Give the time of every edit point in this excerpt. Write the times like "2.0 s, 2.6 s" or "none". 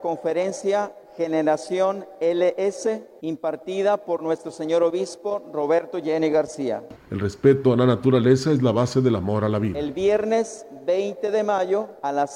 7.0 s